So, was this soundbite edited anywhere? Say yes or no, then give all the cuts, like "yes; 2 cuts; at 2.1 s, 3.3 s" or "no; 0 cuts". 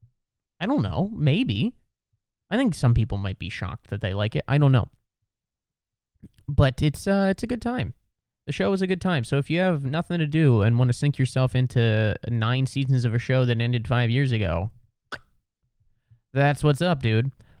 no; 0 cuts